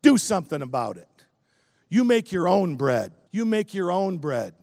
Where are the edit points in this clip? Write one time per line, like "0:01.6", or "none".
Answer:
0:01.8
0:03.3